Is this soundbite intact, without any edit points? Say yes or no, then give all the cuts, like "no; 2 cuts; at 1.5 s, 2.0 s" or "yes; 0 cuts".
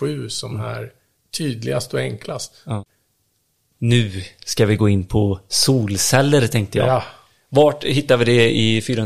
yes; 0 cuts